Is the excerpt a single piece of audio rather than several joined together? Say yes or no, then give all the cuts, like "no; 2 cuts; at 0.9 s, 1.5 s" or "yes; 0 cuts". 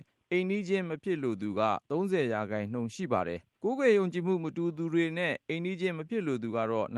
no; 1 cut; at 3.6 s